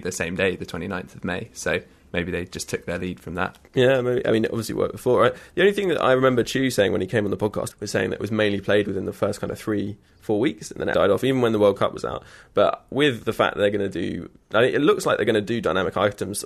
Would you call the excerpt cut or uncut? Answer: cut